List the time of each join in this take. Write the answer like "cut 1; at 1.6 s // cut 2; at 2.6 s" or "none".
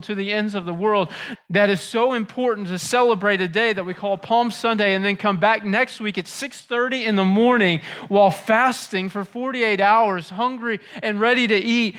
cut 1; at 1.4 s